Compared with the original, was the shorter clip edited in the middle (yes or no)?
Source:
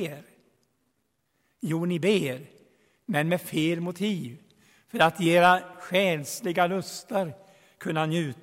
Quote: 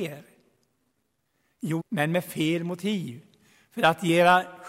yes